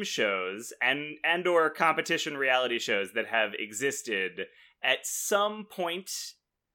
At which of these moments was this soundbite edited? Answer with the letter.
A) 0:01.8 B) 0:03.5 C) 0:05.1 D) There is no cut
D